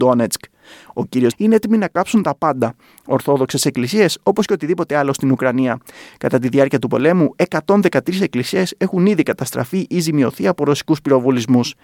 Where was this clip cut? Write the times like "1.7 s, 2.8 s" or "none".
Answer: 1.3 s